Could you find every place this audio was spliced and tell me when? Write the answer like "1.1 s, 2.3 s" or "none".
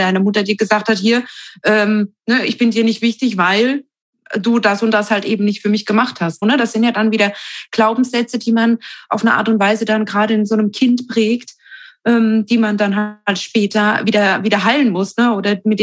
6.4 s